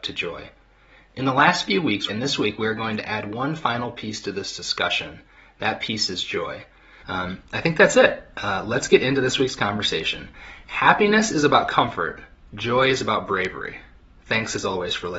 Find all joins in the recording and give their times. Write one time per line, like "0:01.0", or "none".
0:02.1
0:07.0